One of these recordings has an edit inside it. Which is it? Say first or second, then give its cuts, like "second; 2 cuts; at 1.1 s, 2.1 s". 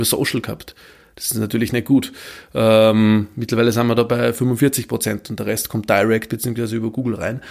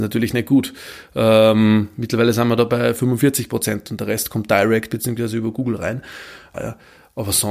second; 1 cut; at 6.5 s